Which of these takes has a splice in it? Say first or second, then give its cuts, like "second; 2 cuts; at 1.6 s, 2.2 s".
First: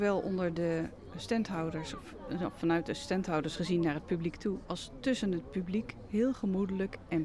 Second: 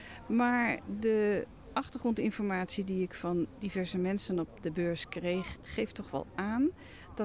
second; 1 cut; at 1.7 s